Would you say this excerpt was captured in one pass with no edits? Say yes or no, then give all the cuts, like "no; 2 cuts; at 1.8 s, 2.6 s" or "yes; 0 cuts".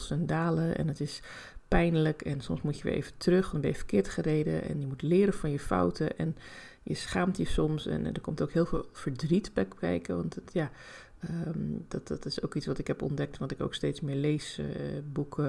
yes; 0 cuts